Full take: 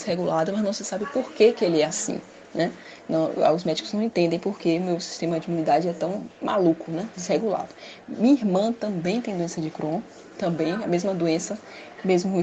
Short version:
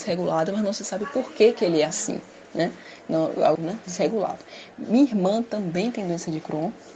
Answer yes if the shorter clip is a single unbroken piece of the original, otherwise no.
no